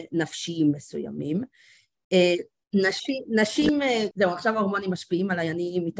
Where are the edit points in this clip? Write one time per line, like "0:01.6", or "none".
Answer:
0:02.6
0:04.1